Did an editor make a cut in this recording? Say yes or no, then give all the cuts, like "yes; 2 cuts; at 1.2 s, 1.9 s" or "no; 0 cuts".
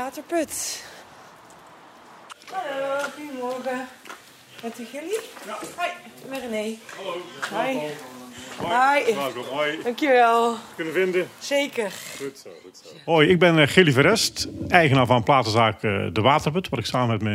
no; 0 cuts